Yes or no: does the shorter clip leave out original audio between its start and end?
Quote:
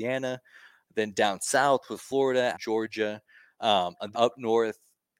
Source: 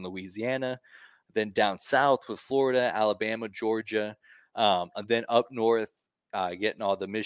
yes